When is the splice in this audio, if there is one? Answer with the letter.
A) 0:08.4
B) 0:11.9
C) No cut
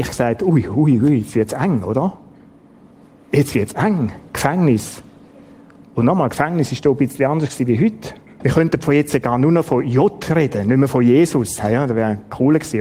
A